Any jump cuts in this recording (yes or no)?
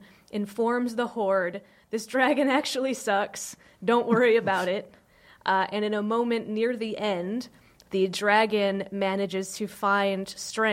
no